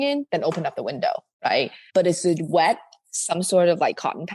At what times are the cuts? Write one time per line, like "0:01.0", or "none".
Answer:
0:01.9